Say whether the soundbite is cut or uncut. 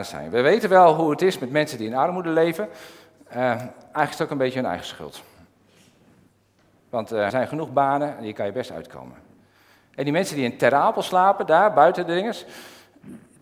cut